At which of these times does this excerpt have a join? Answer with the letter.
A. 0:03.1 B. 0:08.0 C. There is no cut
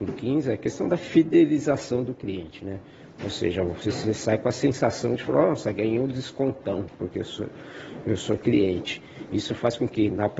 C